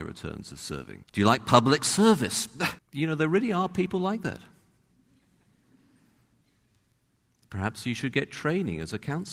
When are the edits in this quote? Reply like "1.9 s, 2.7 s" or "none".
1.0 s, 2.8 s